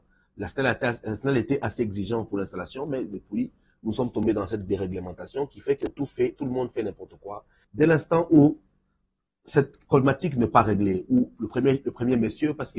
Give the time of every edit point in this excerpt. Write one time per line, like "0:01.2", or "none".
0:07.6